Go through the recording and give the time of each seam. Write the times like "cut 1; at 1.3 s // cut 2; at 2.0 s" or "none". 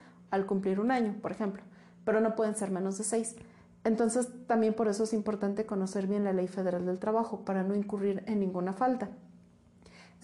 none